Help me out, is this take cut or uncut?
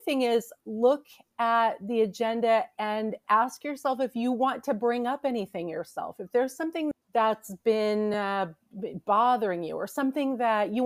uncut